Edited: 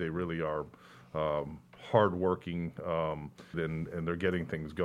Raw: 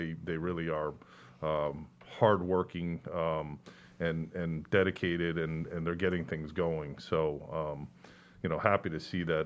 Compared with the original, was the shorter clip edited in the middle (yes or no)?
yes